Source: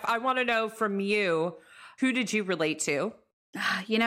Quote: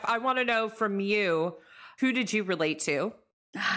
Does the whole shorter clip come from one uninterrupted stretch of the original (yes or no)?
yes